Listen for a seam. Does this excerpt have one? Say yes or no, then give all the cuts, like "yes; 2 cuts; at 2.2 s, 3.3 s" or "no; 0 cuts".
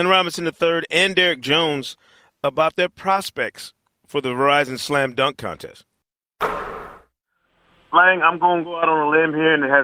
no; 0 cuts